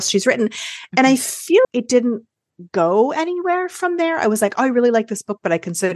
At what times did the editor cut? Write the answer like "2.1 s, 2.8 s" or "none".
1.6 s